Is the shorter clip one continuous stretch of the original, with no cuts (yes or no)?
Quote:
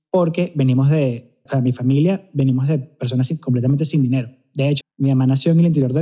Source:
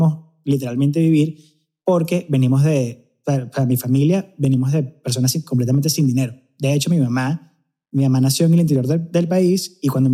no